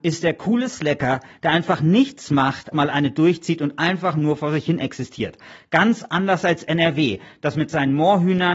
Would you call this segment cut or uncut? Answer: cut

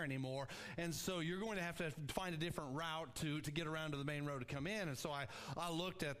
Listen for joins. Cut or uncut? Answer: uncut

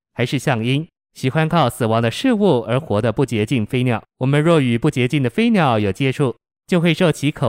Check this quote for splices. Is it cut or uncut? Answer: cut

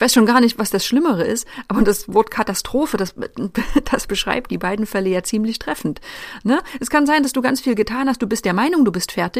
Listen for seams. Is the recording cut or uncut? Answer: uncut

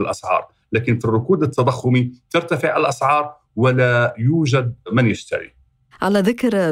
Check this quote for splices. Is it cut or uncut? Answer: uncut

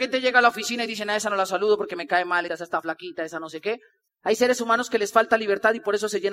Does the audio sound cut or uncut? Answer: cut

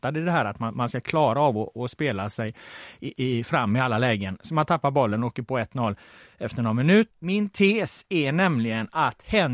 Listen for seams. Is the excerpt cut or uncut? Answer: cut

